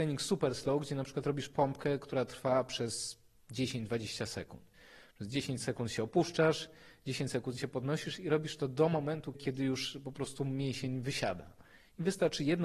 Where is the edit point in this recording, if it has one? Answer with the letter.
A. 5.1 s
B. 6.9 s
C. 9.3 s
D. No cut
C